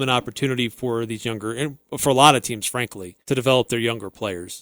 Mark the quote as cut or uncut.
cut